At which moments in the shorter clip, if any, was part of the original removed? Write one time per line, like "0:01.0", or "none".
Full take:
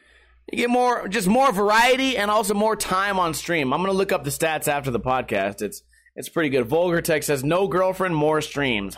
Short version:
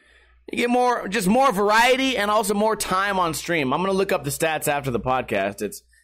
none